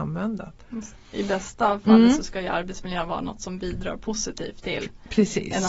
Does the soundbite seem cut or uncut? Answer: uncut